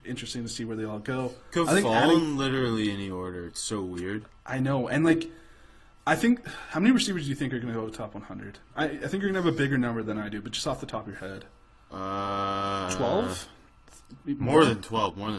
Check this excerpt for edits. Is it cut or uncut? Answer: uncut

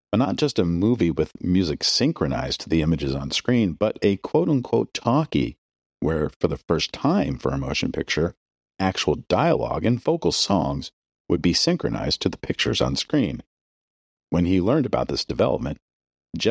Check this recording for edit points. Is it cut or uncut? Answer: uncut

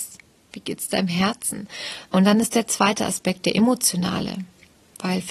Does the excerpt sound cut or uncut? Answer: cut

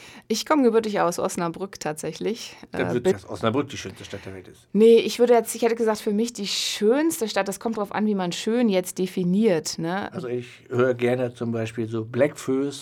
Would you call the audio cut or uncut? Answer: cut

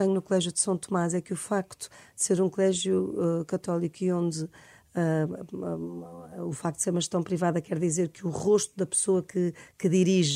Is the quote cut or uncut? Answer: uncut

